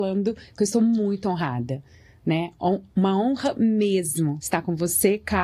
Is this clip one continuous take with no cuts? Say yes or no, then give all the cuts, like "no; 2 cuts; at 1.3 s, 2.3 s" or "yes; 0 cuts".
yes; 0 cuts